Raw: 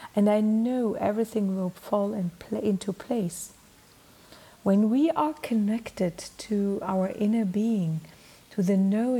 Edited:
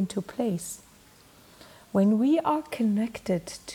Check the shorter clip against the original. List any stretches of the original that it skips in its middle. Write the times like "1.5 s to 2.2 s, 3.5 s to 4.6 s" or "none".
none